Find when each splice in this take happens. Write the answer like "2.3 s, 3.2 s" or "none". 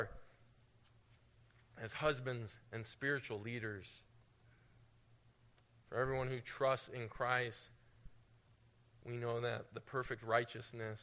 none